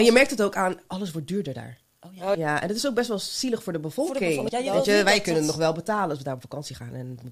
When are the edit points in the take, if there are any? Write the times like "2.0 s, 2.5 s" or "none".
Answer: 2.3 s, 4.5 s